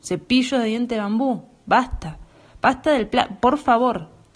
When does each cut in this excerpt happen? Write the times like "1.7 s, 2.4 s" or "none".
none